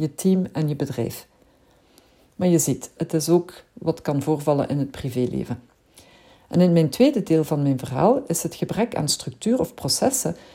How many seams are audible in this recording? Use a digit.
1